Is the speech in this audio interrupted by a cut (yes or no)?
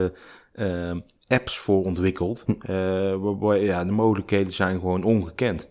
no